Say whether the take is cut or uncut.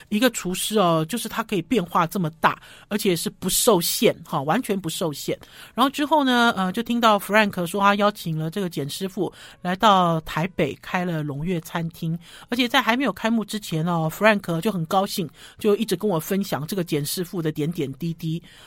uncut